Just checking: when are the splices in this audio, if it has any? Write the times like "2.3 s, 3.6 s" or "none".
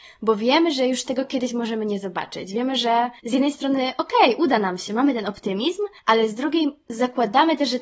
none